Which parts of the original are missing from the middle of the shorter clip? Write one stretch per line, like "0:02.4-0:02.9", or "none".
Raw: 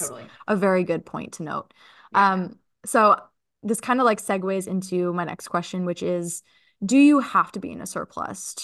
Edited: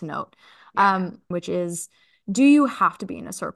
0:02.7-0:05.8